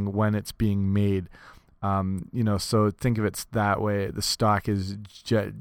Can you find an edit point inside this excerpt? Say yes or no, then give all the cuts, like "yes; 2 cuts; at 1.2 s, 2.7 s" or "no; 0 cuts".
no; 0 cuts